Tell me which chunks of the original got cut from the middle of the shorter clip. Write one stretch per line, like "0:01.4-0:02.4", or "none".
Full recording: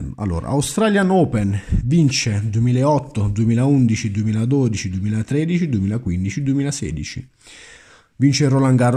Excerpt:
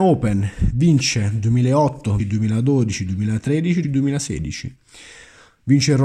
0:03.3-0:04.0
0:05.7-0:06.4